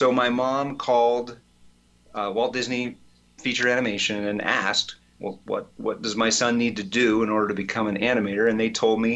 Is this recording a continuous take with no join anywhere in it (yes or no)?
yes